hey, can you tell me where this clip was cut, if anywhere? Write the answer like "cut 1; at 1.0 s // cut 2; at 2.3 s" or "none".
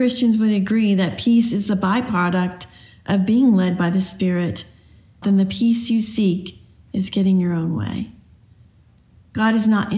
cut 1; at 5.2 s

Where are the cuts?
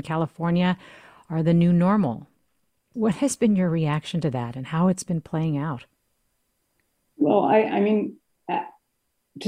cut 1; at 2.9 s

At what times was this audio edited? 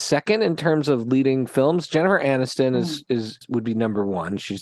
cut 1; at 3.4 s

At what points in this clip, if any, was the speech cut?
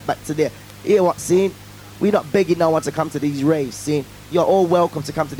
cut 1; at 1.2 s

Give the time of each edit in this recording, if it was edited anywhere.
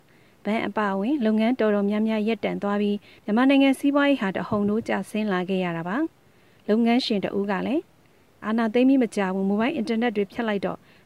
none

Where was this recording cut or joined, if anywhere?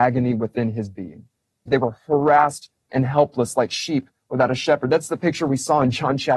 cut 1; at 1.7 s

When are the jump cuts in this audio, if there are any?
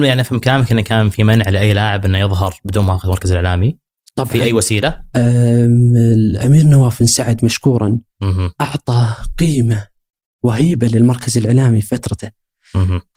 none

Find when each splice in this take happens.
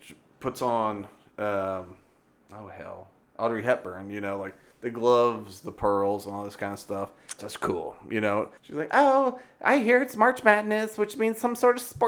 cut 1; at 7.4 s // cut 2; at 8.6 s

